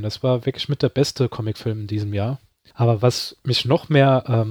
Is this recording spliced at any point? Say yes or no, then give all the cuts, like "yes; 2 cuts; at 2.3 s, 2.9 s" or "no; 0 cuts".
yes; 1 cut; at 2.7 s